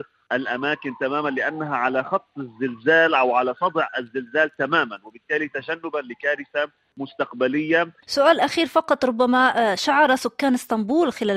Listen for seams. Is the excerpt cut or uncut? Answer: uncut